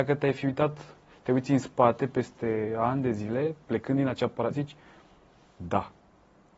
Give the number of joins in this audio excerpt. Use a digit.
1